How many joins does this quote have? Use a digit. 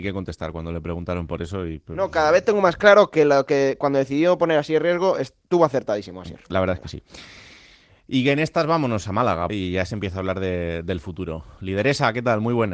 1